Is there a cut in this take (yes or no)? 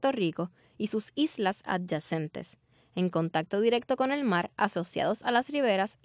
no